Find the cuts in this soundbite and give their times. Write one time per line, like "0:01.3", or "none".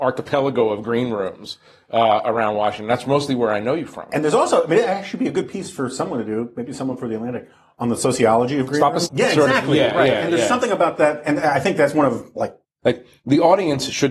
0:09.1